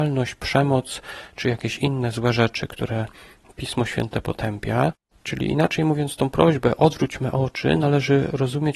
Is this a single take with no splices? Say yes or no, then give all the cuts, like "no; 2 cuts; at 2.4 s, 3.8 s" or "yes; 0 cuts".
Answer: no; 1 cut; at 5.1 s